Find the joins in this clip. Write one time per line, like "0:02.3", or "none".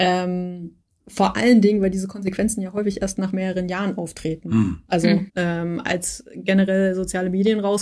0:05.3